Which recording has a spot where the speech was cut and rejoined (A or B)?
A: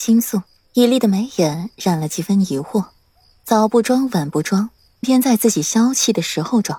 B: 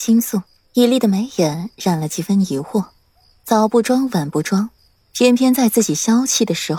A